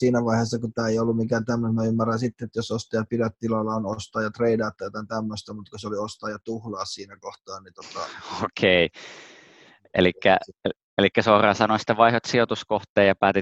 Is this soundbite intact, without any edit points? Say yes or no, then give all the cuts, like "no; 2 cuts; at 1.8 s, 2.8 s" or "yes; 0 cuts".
yes; 0 cuts